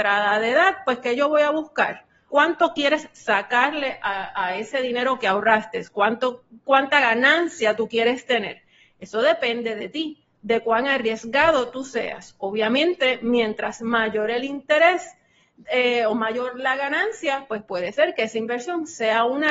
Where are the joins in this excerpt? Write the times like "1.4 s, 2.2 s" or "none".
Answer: 2.3 s